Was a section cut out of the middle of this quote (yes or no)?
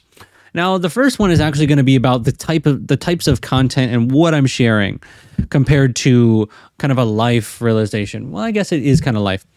no